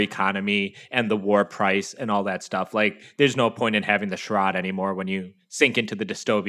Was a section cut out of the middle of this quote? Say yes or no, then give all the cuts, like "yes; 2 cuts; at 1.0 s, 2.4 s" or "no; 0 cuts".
no; 0 cuts